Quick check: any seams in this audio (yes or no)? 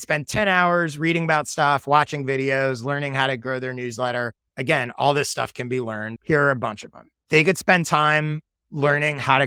yes